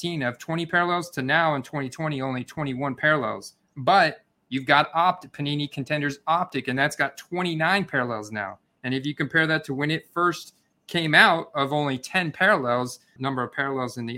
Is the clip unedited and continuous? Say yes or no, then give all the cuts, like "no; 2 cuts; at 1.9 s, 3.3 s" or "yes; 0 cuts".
no; 1 cut; at 13.2 s